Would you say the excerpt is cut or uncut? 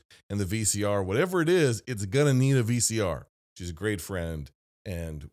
cut